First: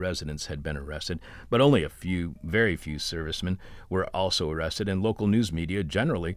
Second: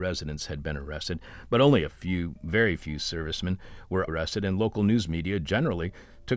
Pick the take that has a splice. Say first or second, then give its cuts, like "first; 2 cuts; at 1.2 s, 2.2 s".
second; 1 cut; at 4.1 s